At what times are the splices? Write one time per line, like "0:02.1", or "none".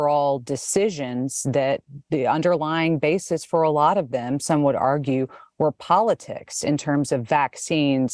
none